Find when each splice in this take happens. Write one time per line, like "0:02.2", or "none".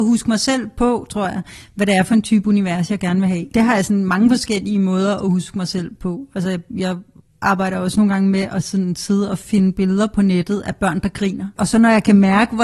none